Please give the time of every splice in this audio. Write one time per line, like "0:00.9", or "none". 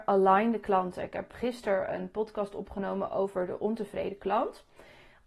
0:01.3